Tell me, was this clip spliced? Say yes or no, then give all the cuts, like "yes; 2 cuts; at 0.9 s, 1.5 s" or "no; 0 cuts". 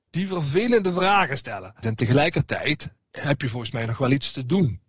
yes; 1 cut; at 1.8 s